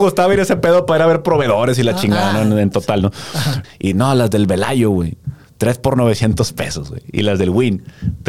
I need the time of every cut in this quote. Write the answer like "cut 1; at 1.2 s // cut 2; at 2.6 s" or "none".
cut 1; at 3.6 s